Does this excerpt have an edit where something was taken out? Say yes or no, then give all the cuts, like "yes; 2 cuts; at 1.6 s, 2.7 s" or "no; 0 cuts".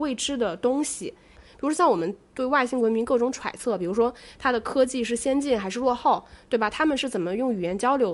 yes; 1 cut; at 1.3 s